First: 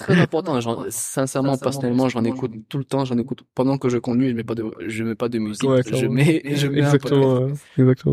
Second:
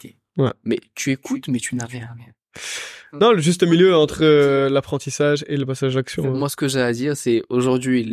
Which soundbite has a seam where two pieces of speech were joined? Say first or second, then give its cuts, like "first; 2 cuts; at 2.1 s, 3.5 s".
first; 1 cut; at 5.8 s